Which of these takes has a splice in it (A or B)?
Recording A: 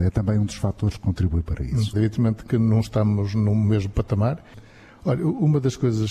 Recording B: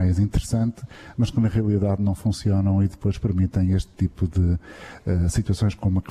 A